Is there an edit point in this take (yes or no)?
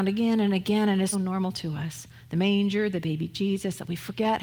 yes